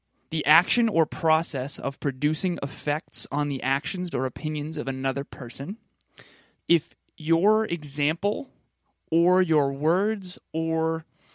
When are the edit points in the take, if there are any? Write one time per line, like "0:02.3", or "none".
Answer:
0:04.1
0:06.5

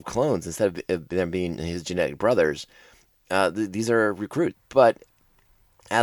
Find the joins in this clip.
0:04.5

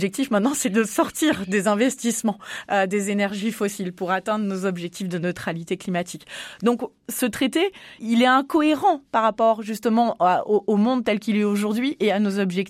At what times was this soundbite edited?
0:08.0

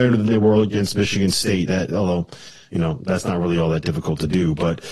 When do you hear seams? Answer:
none

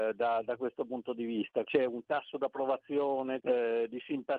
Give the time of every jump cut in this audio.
0:01.6
0:03.4

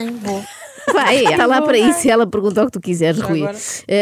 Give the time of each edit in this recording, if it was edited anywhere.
0:01.3

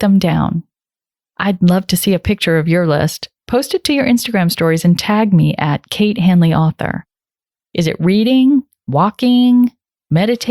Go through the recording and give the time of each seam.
0:07.6

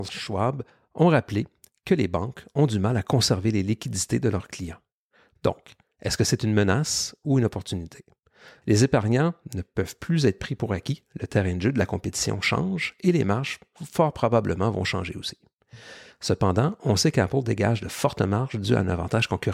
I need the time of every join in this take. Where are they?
0:05.3
0:08.6
0:16.1

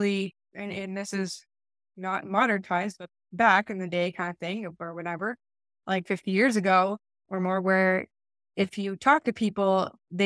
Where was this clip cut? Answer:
none

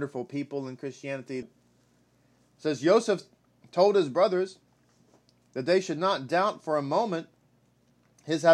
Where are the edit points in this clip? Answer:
0:01.4

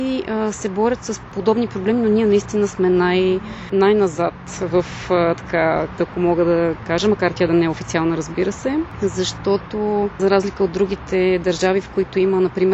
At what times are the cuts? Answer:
0:06.0

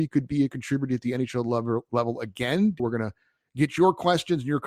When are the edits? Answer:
0:02.8

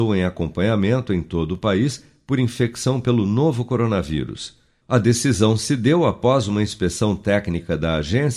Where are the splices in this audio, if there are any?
0:04.8

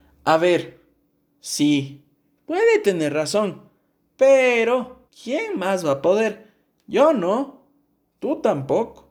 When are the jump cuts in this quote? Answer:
0:05.1

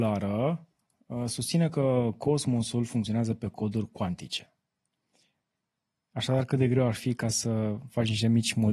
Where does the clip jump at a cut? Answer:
none

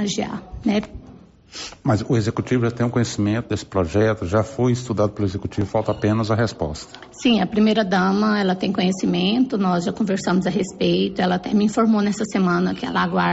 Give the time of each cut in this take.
none

